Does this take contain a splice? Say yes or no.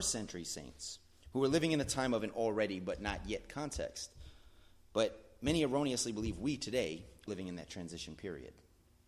yes